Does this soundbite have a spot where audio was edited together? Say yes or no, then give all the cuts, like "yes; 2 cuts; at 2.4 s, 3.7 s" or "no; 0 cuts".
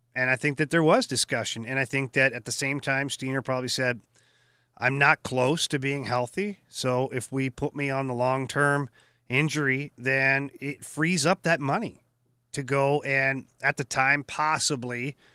no; 0 cuts